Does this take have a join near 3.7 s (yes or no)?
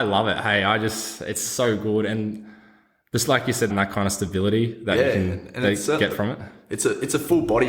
yes